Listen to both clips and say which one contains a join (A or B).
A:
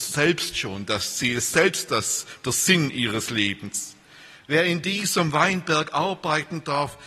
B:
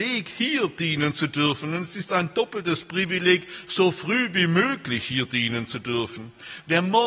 A